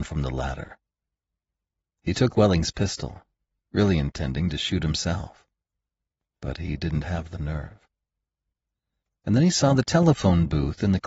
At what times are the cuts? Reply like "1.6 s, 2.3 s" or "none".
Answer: none